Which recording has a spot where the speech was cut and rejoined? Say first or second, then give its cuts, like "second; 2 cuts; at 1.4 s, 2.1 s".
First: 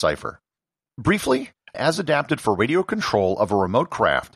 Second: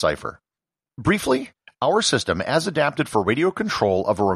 first; 1 cut; at 1.7 s